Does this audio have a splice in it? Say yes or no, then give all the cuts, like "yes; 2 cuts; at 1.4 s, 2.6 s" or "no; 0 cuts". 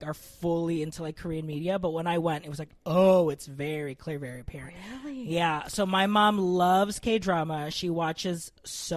no; 0 cuts